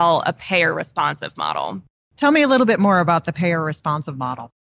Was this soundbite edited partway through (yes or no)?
no